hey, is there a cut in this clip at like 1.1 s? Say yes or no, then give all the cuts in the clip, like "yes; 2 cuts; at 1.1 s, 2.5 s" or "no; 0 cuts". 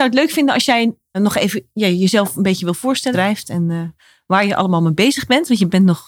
yes; 2 cuts; at 1.1 s, 3.1 s